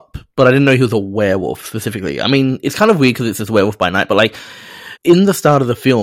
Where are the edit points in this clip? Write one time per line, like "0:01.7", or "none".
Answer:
0:05.0